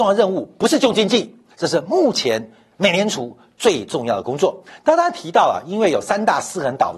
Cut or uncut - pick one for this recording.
cut